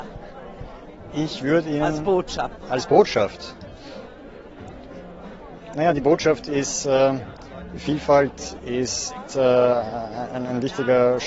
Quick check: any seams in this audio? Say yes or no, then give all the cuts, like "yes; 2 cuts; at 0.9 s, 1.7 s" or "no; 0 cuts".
no; 0 cuts